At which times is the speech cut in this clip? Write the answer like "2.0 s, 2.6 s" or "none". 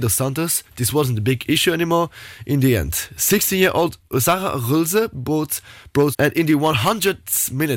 6.1 s